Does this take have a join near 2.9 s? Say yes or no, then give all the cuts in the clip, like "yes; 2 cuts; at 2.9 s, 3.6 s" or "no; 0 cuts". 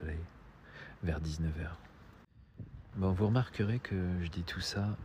yes; 1 cut; at 2.9 s